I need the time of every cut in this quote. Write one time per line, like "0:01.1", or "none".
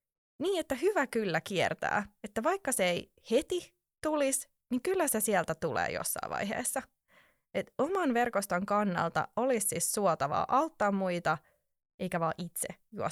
none